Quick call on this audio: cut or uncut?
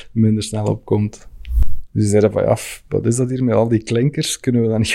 cut